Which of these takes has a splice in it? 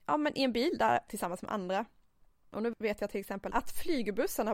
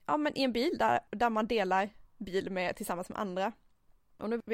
first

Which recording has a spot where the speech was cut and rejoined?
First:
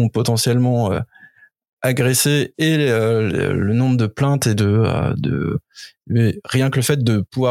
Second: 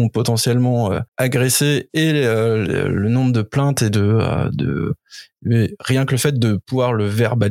second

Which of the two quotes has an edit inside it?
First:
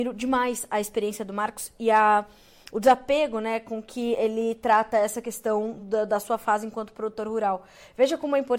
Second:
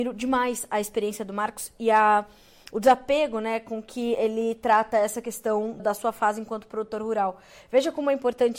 second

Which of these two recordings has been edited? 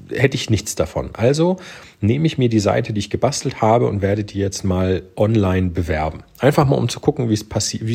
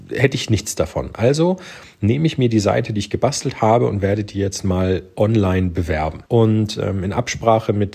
second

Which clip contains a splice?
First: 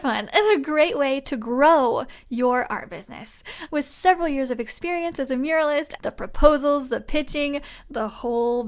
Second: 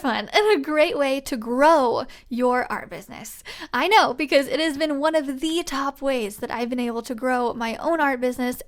first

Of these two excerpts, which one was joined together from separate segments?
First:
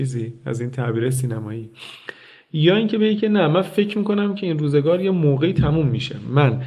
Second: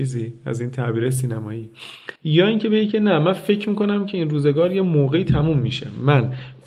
second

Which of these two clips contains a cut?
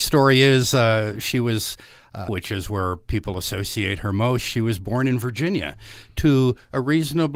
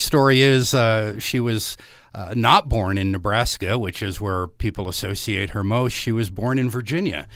first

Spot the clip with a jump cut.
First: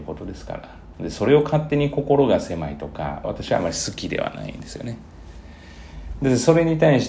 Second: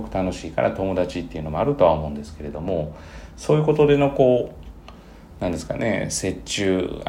first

